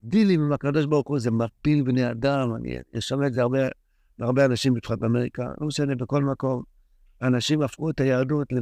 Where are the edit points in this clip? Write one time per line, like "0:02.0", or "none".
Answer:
none